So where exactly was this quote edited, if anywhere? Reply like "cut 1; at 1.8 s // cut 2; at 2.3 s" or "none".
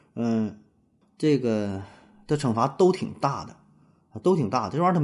cut 1; at 1.0 s